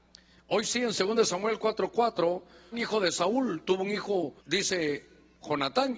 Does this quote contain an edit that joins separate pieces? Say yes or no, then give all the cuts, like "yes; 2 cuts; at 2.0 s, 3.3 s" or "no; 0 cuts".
yes; 2 cuts; at 2.7 s, 4.4 s